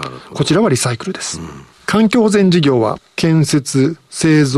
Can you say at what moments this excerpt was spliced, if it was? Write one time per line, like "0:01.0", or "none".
0:01.7